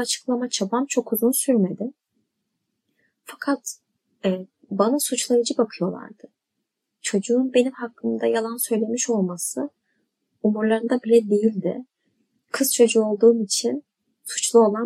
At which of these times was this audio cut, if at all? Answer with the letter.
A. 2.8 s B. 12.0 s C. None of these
C